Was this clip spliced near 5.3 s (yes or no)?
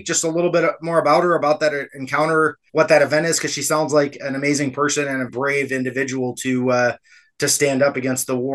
yes